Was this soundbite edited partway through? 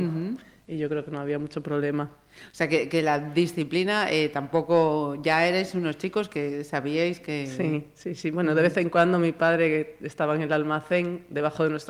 no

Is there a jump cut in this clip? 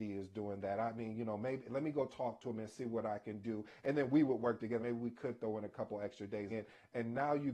yes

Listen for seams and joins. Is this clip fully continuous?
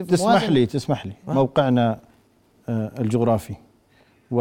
yes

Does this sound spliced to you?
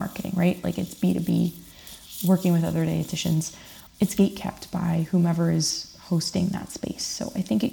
yes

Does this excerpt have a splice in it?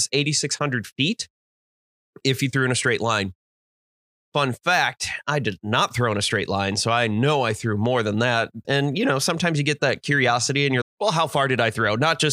yes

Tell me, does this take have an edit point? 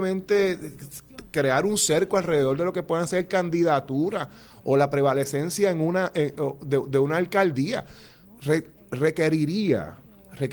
yes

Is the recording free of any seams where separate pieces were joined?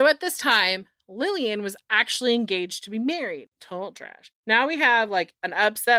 no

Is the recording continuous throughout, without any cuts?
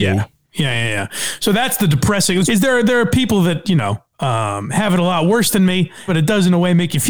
no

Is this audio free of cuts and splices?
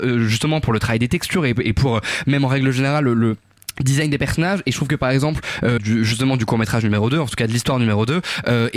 no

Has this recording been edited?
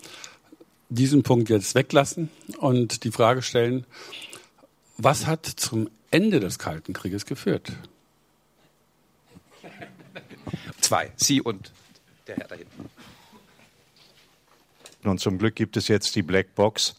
yes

